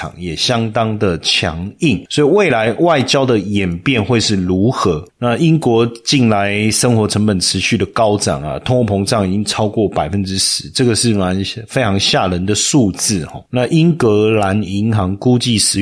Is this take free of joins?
no; 1 cut; at 5.1 s

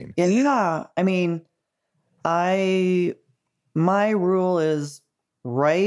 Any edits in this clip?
no; 0 cuts

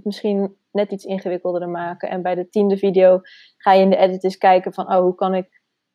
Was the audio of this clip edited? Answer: no; 0 cuts

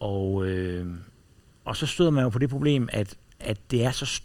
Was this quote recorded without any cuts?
yes; 0 cuts

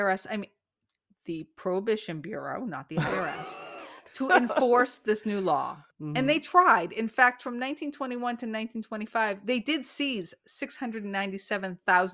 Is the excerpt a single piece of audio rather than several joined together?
no; 1 cut; at 5.9 s

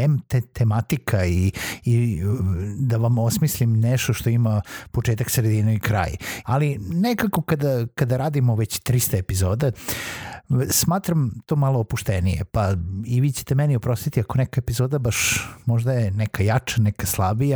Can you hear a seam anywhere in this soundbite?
yes; 2 cuts; at 6.4 s, 9.7 s

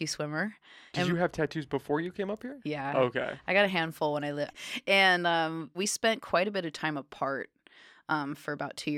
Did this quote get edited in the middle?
yes; 3 cuts; at 0.9 s, 4.5 s, 5.7 s

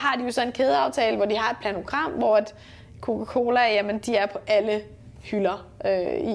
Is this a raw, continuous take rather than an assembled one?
yes; 0 cuts

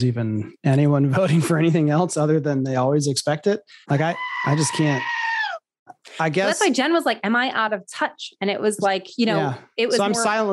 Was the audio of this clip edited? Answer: no; 0 cuts

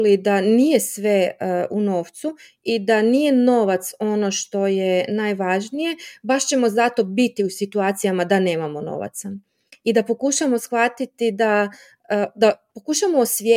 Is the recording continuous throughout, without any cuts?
yes; 0 cuts

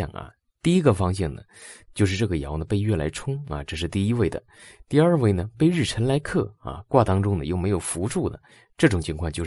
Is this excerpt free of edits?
yes; 0 cuts

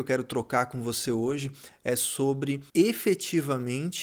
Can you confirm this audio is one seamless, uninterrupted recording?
no; 1 cut; at 2.7 s

